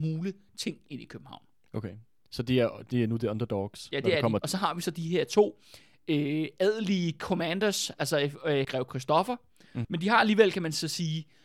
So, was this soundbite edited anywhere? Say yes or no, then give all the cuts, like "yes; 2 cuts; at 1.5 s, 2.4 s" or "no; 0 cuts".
yes; 3 cuts; at 4.4 s, 8.6 s, 9.8 s